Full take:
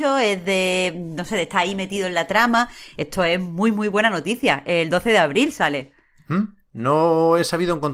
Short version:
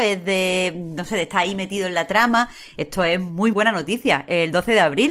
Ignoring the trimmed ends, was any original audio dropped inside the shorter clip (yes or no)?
yes